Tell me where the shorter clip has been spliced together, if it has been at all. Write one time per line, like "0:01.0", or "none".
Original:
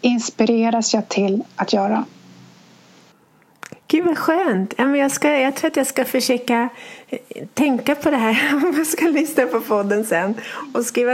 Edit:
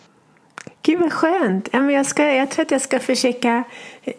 none